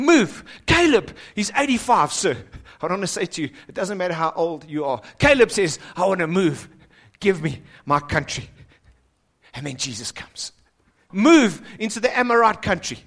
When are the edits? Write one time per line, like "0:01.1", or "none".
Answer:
0:11.1